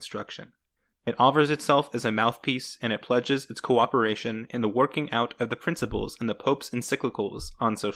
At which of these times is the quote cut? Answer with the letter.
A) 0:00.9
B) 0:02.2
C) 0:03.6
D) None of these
A